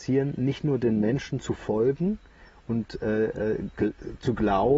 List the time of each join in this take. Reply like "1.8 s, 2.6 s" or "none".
none